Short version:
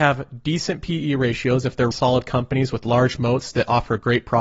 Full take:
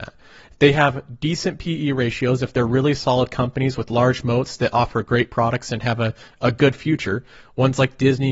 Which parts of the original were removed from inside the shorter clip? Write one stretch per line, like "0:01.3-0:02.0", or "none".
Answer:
0:02.7-0:03.0